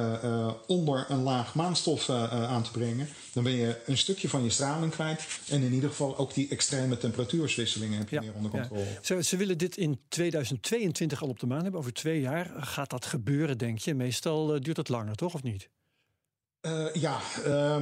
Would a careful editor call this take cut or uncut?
uncut